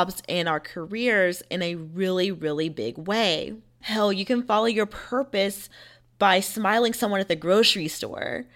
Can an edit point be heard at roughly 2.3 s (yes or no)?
no